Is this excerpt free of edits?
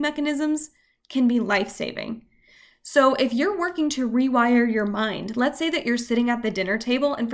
yes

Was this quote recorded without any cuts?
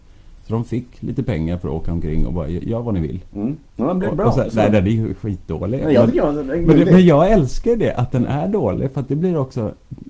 yes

